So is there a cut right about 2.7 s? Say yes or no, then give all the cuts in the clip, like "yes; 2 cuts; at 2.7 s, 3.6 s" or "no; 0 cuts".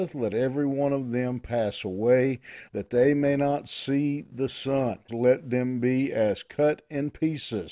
yes; 2 cuts; at 2.7 s, 5.1 s